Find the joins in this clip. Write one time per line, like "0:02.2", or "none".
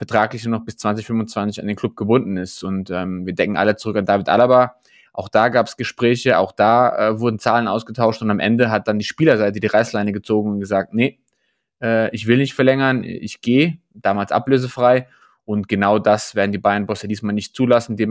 none